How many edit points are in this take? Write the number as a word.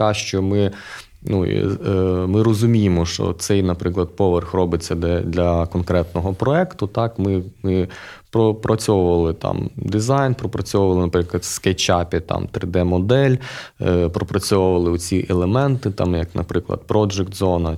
zero